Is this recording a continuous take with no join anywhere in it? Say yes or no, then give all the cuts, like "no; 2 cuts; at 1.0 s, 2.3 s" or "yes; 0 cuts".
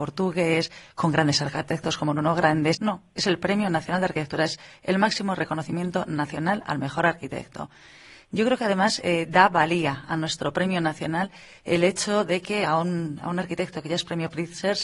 no; 1 cut; at 2.7 s